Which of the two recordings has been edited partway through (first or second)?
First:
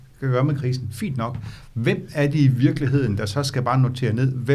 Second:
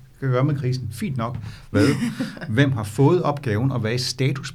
second